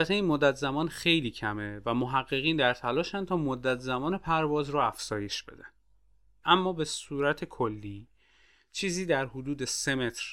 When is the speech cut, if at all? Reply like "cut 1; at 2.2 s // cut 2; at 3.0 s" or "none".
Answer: cut 1; at 6.4 s